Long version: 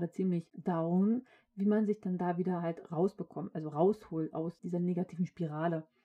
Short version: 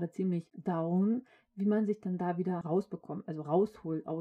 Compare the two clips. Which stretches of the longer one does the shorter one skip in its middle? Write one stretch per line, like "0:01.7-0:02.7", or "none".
0:02.6-0:02.9